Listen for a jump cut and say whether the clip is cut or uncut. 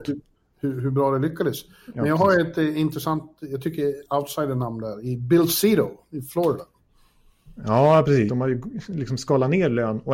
cut